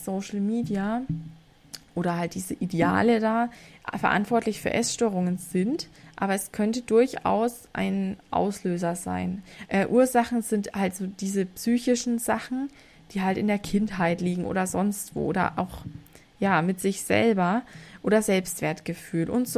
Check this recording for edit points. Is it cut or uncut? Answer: cut